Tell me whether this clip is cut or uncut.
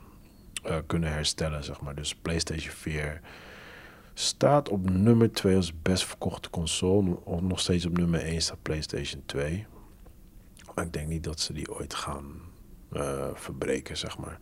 uncut